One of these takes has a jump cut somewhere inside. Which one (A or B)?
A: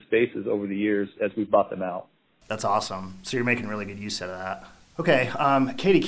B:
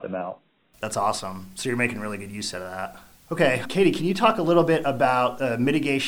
B